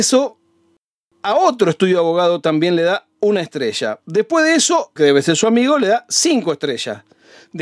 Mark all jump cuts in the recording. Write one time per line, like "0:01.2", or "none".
0:05.0

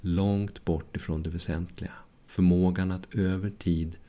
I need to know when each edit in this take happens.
none

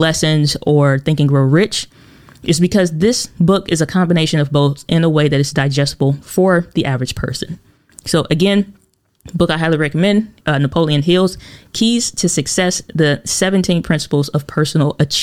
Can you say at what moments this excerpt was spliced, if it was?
0:10.4

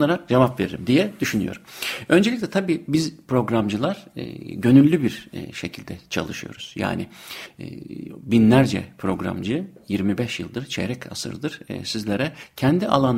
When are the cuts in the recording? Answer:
none

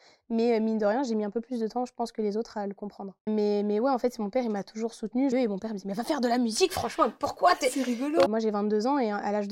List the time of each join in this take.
0:03.3
0:05.3
0:08.3

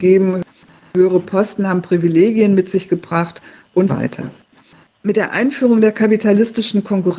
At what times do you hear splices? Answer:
0:03.9

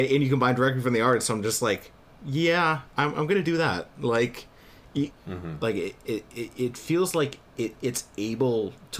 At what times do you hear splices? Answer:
0:05.1

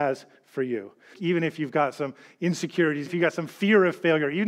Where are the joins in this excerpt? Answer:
0:01.1
0:03.1

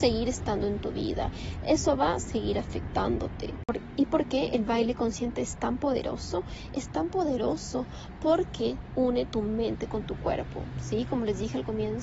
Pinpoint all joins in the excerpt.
none

